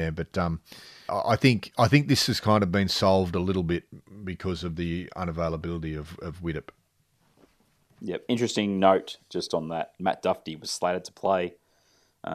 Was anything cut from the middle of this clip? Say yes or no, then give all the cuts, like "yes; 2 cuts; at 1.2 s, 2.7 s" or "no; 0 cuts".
yes; 1 cut; at 1.1 s